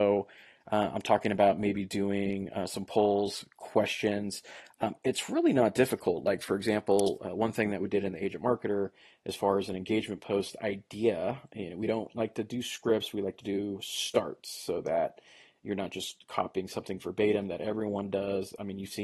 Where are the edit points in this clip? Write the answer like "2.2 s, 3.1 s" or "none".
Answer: none